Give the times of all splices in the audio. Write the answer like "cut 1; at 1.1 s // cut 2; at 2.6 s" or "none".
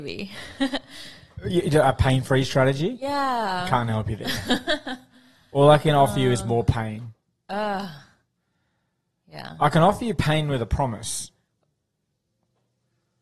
none